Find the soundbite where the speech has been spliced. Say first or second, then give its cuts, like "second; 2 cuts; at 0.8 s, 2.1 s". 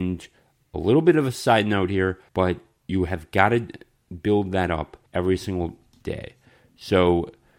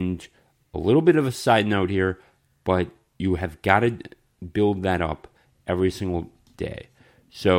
first; 2 cuts; at 2.3 s, 5.1 s